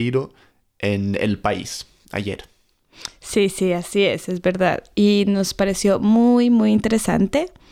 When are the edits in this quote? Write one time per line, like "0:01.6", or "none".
none